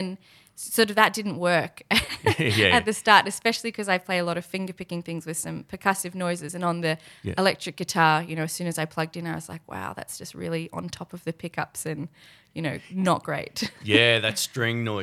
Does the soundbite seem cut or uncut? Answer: uncut